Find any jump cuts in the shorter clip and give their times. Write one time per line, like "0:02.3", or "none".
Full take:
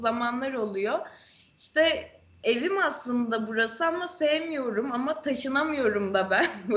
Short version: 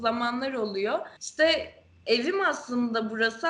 0:01.2

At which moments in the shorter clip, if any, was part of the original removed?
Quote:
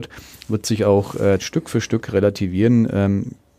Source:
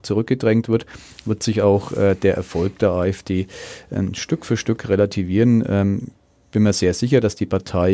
0:01.4

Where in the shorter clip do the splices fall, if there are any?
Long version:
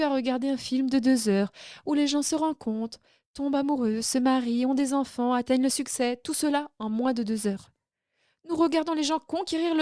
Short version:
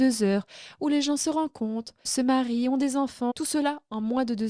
0:02.0
0:03.3

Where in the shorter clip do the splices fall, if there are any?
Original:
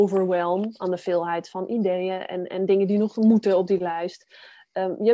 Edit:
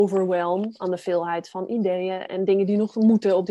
0:02.3

